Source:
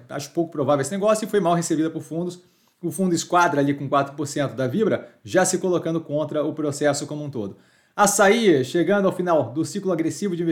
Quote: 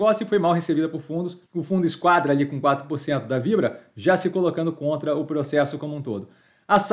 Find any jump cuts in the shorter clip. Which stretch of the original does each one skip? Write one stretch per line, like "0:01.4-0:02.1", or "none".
0:02.5-0:02.7